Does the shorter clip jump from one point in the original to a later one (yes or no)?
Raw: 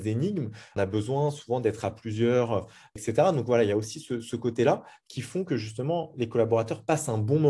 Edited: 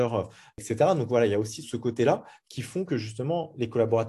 yes